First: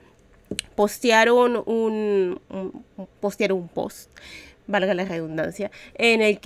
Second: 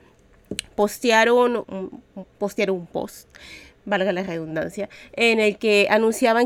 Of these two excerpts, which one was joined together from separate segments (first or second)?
second